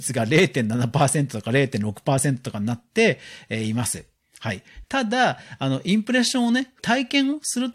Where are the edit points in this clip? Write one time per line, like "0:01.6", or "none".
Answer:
0:04.8
0:06.8